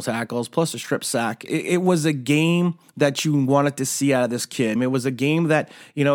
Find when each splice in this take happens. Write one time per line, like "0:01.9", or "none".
0:01.5
0:02.9
0:04.8